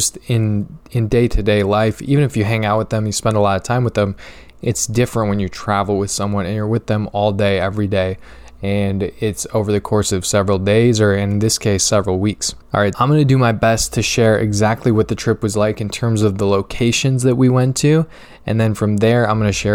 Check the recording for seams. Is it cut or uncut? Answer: cut